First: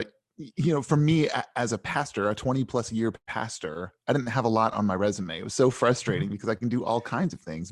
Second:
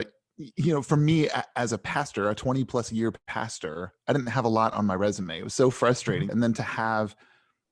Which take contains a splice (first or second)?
second